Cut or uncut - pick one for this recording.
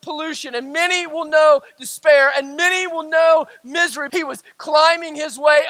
cut